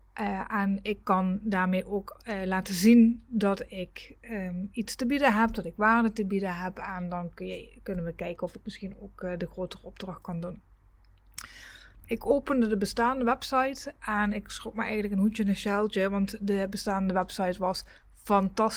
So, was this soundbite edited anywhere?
yes; 1 cut; at 11.9 s

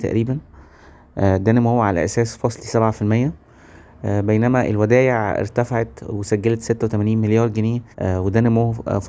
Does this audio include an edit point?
yes; 1 cut; at 7.9 s

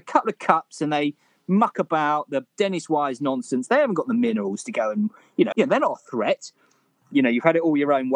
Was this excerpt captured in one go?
no; 1 cut; at 5.5 s

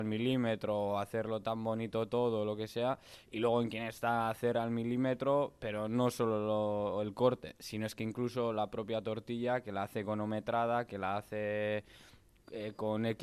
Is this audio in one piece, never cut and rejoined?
yes; 0 cuts

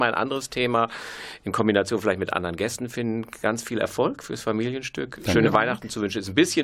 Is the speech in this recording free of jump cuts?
yes; 0 cuts

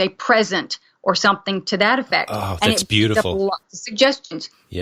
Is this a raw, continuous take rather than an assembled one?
yes; 0 cuts

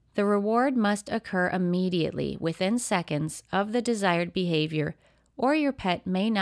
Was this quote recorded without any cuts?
yes; 0 cuts

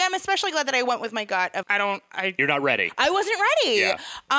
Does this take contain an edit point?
yes; 1 cut; at 1.6 s

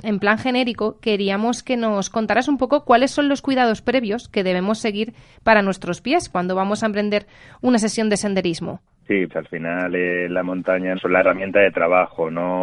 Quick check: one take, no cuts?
no; 2 cuts; at 9.3 s, 11.0 s

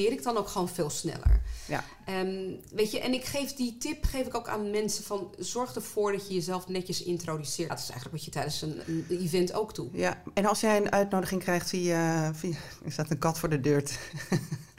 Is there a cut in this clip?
yes; 1 cut; at 7.7 s

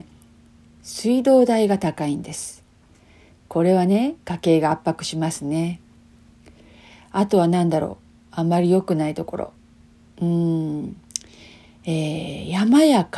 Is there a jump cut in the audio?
no; 0 cuts

